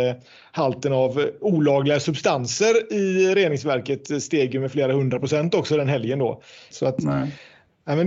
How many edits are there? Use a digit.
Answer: 1